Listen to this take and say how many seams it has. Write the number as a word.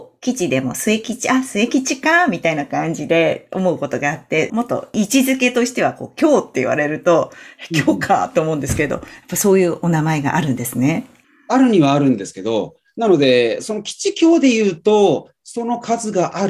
one